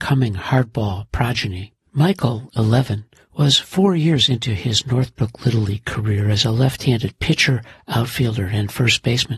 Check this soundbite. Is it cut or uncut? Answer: cut